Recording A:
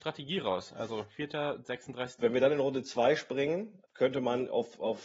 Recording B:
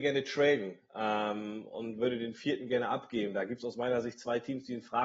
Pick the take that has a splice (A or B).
A